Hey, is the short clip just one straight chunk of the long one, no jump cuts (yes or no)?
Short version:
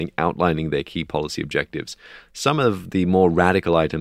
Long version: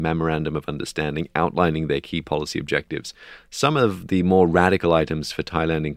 yes